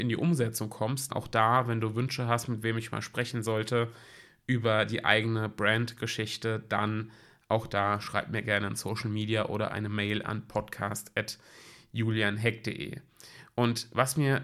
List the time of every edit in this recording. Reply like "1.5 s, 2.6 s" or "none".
1.1 s